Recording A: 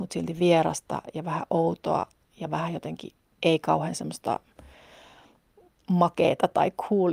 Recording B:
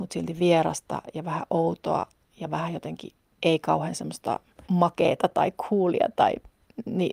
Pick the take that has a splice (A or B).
B